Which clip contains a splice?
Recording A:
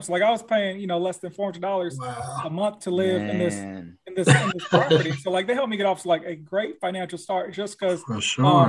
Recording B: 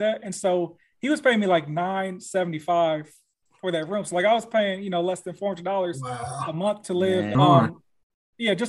B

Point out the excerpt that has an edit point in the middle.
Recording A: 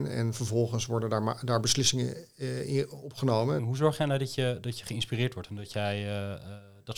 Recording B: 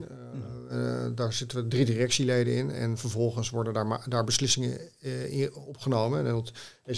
A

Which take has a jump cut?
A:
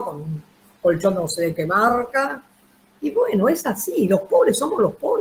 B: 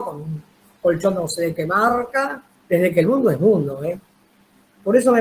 B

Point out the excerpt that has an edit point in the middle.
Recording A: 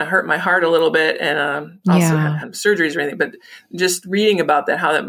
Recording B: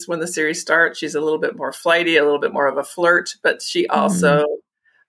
A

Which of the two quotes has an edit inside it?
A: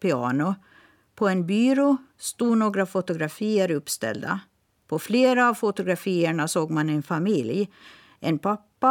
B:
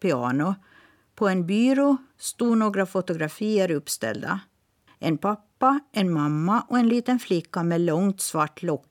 B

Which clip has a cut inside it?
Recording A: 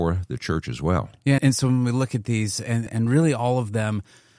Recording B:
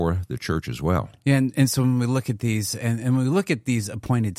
A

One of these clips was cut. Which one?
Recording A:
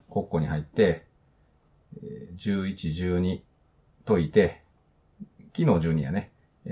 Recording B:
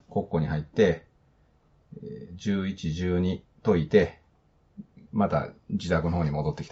B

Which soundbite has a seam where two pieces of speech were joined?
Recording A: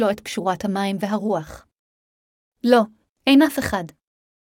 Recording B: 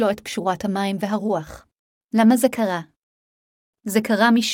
B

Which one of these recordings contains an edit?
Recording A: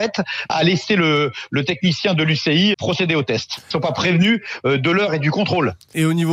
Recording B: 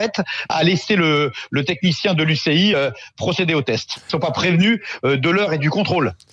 A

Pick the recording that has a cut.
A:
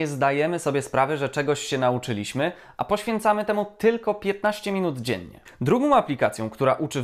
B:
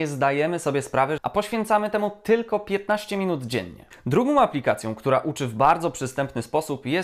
B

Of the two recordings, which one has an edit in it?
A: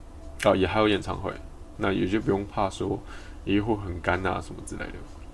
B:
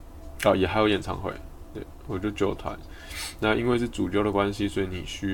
A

